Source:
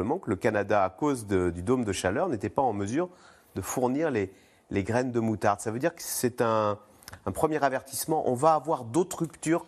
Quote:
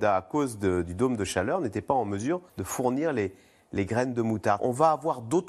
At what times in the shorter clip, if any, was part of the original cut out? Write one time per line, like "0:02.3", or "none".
0:02.5
0:04.6